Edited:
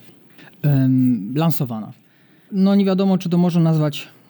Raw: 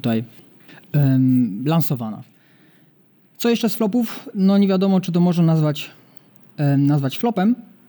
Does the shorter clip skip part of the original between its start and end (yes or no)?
yes